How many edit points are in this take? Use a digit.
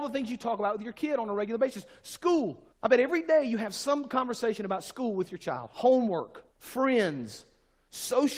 2